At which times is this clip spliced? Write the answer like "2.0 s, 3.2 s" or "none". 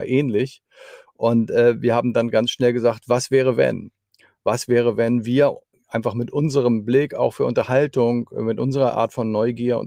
none